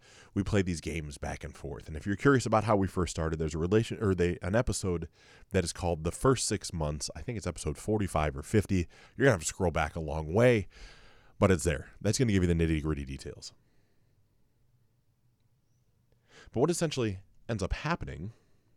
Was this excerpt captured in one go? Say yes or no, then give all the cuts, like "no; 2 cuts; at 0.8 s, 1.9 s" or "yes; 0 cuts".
yes; 0 cuts